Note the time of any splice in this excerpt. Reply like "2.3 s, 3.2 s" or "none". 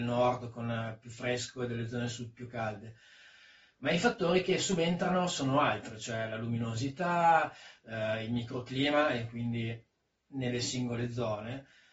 none